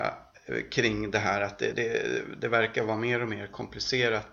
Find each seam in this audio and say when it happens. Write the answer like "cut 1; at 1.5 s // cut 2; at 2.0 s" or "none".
none